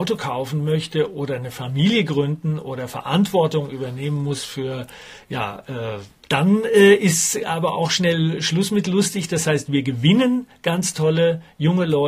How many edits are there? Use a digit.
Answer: 1